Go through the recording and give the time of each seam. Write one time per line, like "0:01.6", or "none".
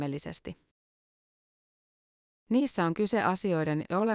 none